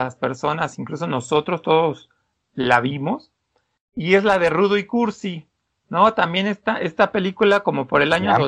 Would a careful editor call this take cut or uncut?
uncut